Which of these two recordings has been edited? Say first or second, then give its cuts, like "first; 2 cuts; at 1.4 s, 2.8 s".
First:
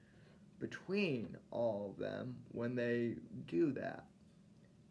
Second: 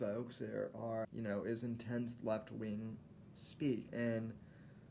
second; 2 cuts; at 1.0 s, 3.9 s